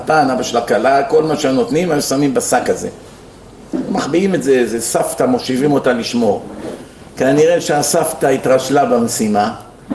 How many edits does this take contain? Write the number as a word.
zero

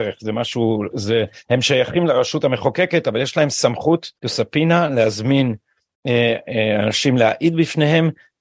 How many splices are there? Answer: two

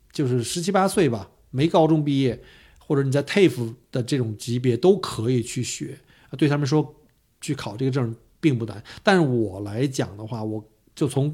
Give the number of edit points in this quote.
zero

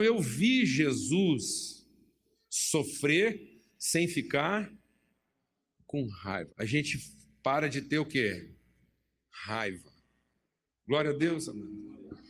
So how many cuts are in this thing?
one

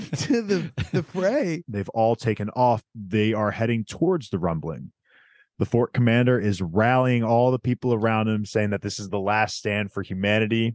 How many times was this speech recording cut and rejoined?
two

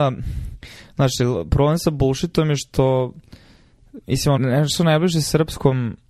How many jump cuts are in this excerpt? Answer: one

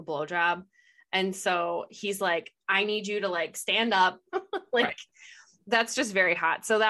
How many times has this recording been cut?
one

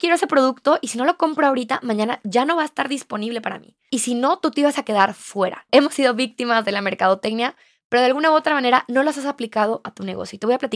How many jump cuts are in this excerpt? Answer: two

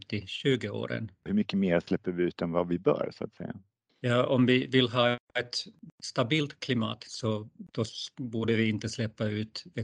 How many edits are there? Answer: one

